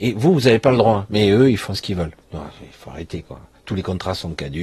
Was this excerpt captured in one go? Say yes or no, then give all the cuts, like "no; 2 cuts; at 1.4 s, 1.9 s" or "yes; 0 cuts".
yes; 0 cuts